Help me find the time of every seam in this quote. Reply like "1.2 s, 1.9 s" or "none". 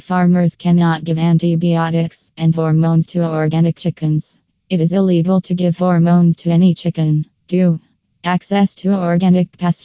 2.3 s, 7.3 s

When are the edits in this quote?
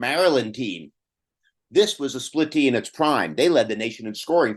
1.6 s

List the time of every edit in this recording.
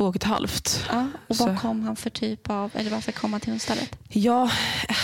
none

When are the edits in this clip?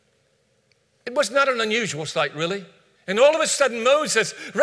3.0 s

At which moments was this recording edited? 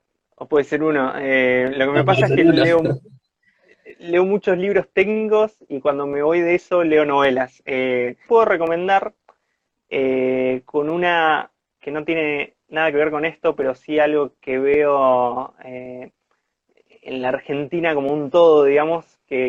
8.3 s, 11.8 s

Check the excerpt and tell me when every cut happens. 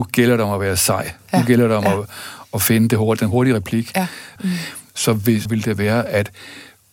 4.4 s, 5.5 s

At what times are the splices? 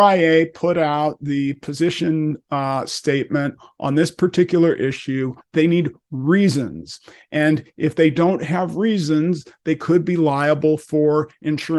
5.4 s

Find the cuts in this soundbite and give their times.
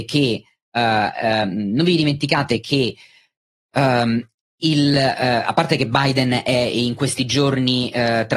none

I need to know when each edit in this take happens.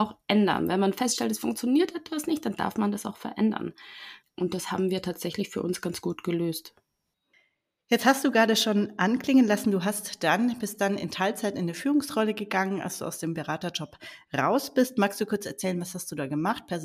none

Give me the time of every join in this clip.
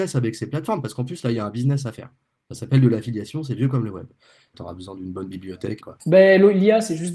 4.5 s, 5.8 s

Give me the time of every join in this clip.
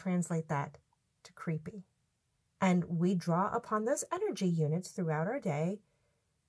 2.4 s

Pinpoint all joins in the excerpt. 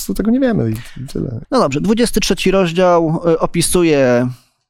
1.4 s

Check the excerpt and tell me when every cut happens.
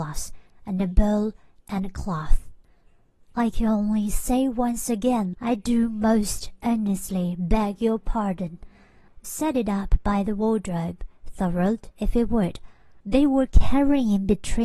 5.3 s, 9.1 s, 13.0 s

